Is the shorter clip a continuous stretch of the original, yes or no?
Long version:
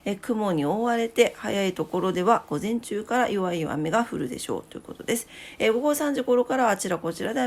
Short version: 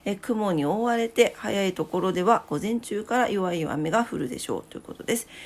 yes